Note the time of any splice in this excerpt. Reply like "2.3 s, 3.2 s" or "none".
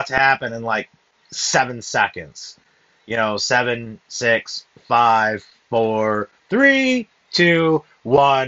none